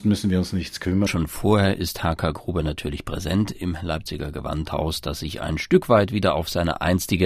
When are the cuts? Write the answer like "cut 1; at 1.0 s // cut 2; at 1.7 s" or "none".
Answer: cut 1; at 1.1 s